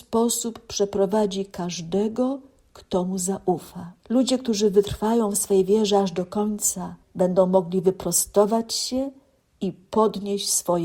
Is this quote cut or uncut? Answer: cut